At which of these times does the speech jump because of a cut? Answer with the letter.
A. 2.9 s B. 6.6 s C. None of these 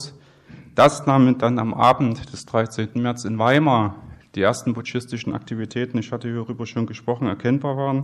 A